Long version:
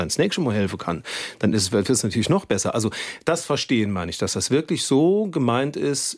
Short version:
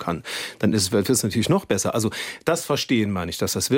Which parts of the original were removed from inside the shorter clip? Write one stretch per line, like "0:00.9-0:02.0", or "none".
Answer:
none